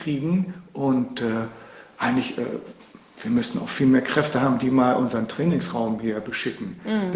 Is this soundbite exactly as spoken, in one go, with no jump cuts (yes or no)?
yes